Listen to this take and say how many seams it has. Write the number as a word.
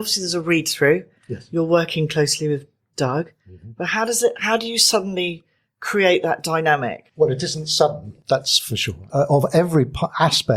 two